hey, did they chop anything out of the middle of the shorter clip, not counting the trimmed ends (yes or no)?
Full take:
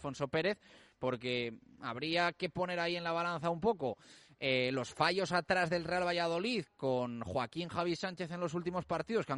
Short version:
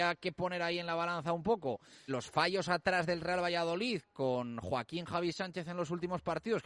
yes